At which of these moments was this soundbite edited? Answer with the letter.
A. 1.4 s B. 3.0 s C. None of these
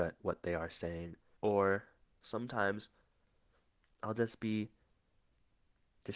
A